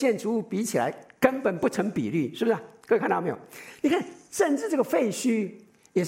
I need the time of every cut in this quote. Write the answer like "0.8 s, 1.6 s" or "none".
none